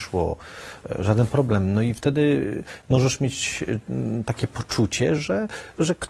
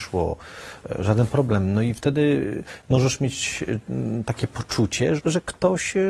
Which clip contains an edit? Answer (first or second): second